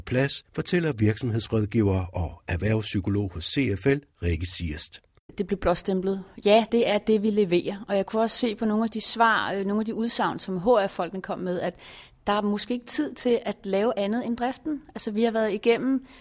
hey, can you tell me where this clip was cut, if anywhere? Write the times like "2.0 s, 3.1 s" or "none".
6.7 s